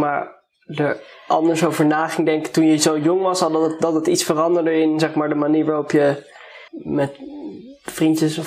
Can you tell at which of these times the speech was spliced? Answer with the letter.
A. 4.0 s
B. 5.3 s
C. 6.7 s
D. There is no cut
C